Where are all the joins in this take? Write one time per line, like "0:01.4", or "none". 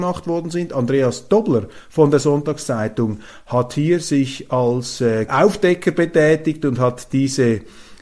0:05.3